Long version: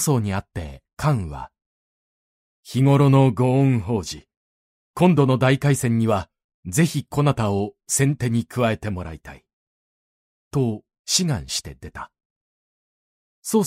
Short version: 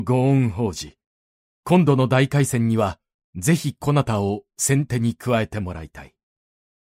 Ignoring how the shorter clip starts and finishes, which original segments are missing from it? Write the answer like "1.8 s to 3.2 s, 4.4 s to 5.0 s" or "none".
none